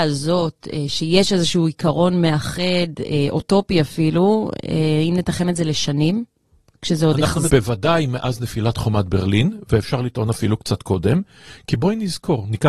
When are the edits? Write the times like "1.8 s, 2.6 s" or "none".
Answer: 7.5 s